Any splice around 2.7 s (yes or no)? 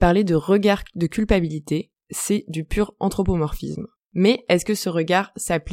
no